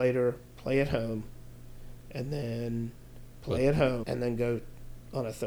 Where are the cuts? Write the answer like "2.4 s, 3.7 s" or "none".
4.0 s